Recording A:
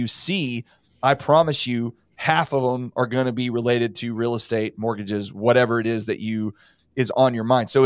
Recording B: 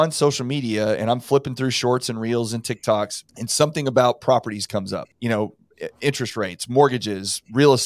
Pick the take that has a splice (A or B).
B